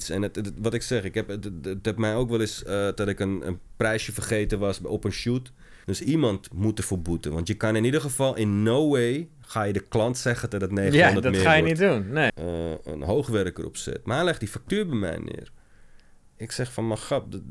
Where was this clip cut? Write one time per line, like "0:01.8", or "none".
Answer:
0:05.8
0:12.3